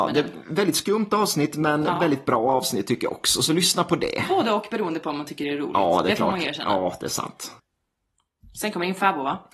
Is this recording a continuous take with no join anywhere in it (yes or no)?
yes